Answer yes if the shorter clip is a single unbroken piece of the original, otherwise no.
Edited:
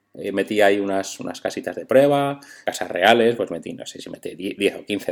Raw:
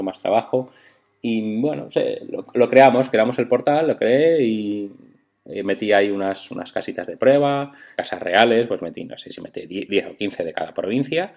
yes